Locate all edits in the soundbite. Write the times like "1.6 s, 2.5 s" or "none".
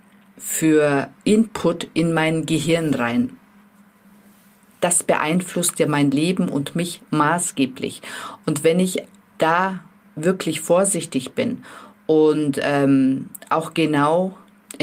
1.2 s